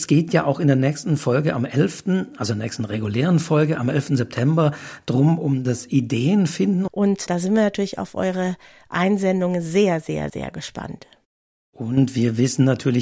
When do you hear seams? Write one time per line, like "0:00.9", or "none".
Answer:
0:06.9
0:10.3

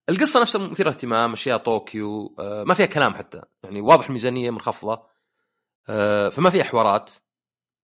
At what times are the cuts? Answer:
none

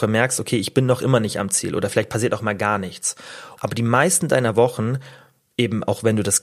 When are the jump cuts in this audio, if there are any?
0:03.6

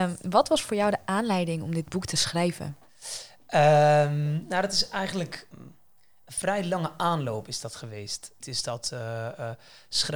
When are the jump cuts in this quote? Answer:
0:05.5
0:08.4

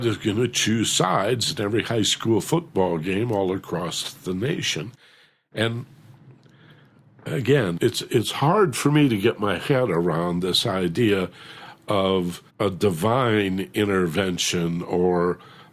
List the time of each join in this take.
0:07.8
0:12.5

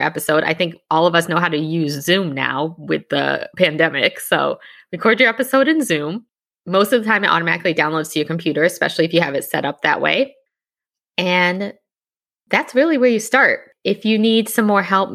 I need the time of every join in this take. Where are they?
none

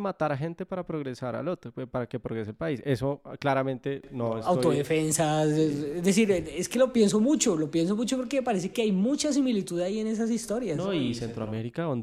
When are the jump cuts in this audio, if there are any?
none

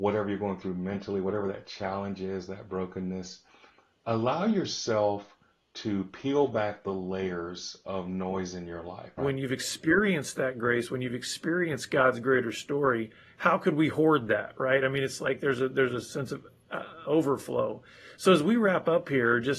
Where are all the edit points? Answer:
0:09.2
0:17.0

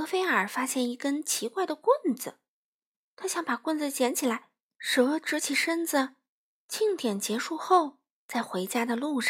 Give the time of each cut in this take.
0:04.6
0:06.6

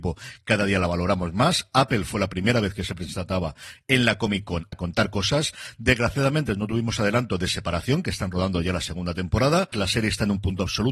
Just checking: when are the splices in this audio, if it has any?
0:04.7
0:09.7

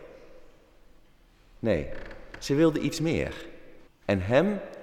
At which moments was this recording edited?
0:03.9

